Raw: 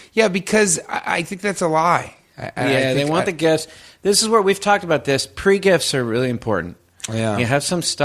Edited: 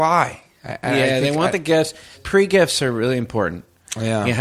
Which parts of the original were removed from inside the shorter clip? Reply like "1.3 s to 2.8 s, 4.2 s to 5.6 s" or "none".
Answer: 3.9 s to 5.3 s